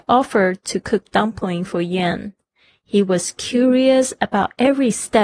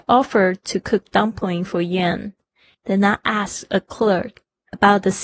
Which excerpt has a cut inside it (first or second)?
second